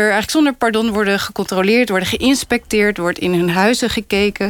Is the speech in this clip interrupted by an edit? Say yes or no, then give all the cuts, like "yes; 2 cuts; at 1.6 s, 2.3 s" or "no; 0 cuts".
no; 0 cuts